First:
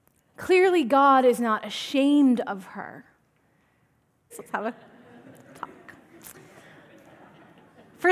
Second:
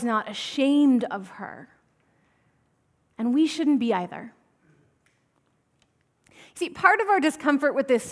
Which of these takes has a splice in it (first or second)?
first